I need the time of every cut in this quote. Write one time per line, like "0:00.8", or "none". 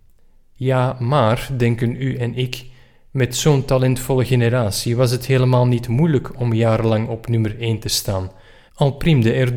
0:08.7